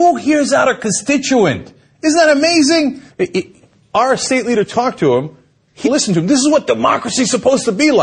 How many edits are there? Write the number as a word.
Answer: two